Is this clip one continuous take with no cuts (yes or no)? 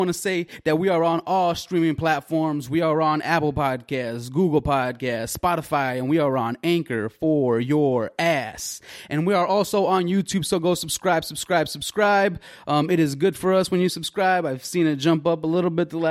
yes